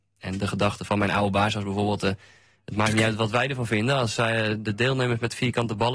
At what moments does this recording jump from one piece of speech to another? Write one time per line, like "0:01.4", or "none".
none